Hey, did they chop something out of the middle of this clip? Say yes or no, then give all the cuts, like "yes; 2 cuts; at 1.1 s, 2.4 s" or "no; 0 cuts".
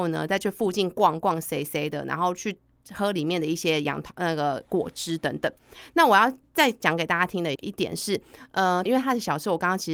yes; 2 cuts; at 7.6 s, 8.9 s